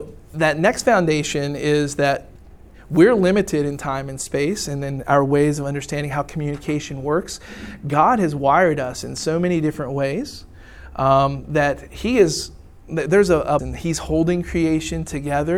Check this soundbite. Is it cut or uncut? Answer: cut